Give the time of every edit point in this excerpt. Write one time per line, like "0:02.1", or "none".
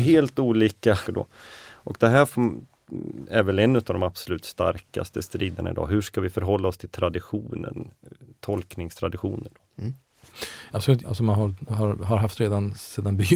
0:01.1
0:11.0